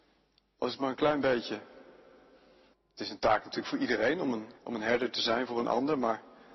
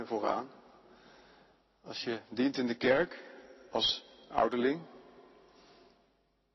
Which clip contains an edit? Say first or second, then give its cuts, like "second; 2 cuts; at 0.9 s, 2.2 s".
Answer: first; 2 cuts; at 2.7 s, 4.6 s